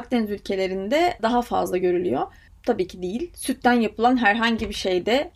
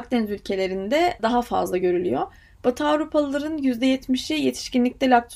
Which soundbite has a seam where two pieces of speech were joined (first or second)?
first